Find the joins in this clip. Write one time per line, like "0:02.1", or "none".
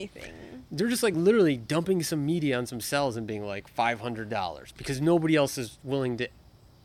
none